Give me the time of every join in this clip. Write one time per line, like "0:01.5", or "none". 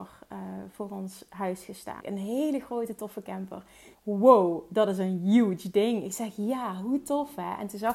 0:02.0
0:03.9